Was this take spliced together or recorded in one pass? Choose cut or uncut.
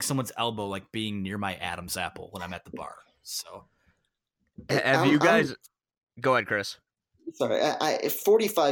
uncut